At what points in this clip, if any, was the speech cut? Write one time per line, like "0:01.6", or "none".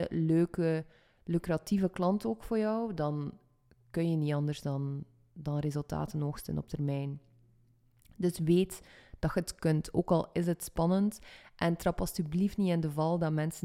none

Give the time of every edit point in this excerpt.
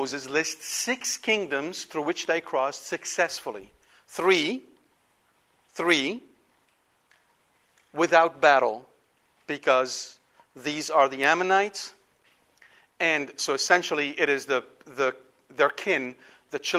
none

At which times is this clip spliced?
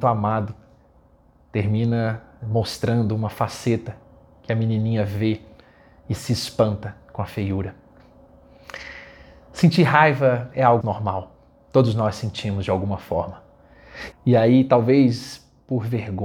0:10.8
0:14.1

